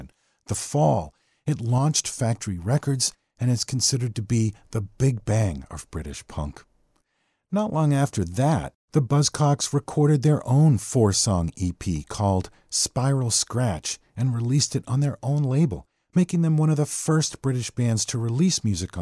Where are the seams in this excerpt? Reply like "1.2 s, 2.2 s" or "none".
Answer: none

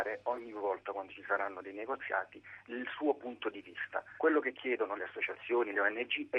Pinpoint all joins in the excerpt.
4.2 s

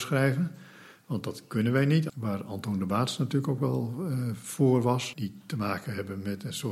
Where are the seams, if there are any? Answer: 2.1 s, 5.1 s

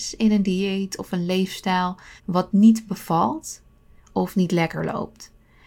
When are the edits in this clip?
2.2 s

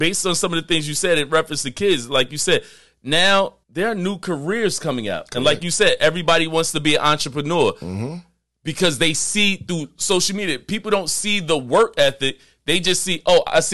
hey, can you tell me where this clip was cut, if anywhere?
3.6 s

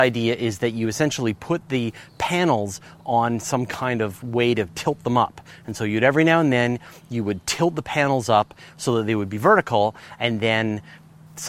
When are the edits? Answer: none

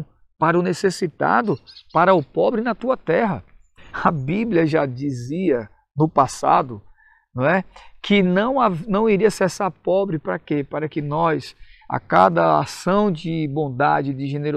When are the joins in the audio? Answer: none

